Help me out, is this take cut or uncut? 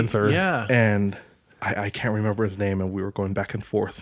uncut